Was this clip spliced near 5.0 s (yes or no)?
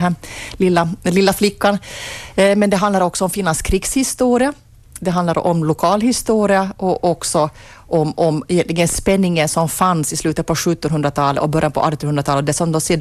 no